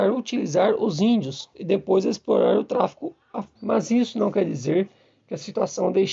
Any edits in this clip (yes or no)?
yes